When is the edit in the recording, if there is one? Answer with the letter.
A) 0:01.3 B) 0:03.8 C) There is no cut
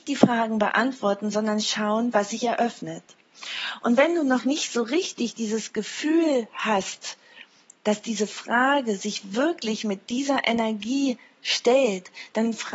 C